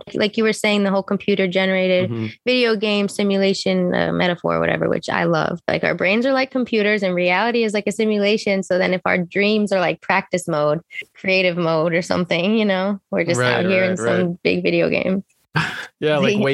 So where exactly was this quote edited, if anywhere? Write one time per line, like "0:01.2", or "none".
none